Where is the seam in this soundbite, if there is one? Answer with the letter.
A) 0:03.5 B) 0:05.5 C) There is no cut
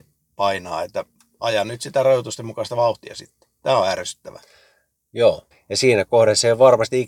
B